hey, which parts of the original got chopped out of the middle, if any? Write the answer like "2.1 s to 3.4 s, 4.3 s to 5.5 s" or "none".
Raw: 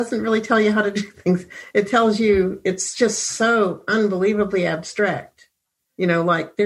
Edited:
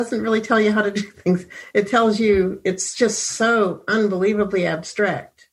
none